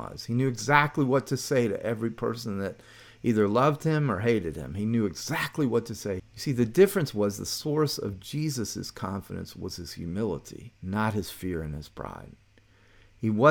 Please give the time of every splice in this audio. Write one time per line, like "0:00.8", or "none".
0:06.2
0:10.8